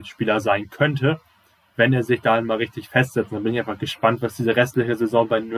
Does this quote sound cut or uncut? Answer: uncut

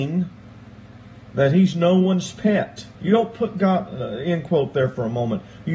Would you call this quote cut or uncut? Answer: cut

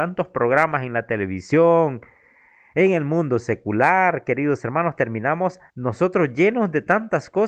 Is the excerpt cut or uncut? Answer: cut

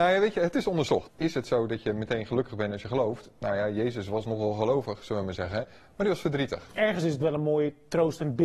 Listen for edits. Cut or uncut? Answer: cut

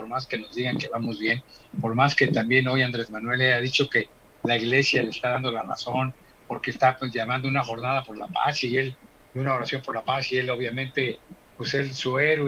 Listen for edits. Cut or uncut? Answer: uncut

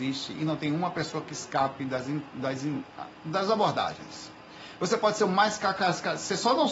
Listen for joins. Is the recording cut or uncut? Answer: uncut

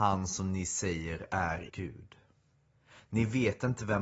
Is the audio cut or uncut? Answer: cut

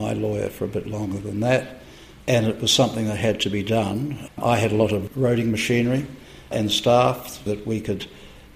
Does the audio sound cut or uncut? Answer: cut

